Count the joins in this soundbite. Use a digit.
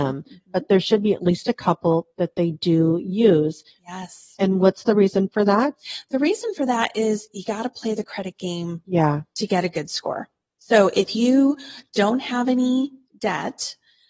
0